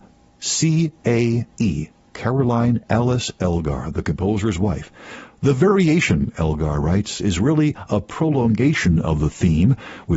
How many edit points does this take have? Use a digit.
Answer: 0